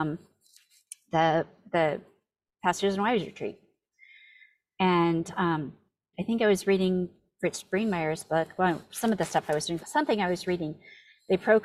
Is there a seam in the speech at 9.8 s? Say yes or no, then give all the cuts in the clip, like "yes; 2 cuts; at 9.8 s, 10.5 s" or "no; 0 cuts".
yes; 2 cuts; at 6.1 s, 9.8 s